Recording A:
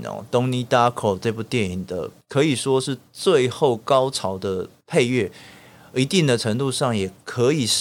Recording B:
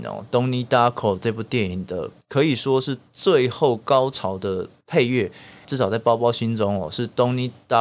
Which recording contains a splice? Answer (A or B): B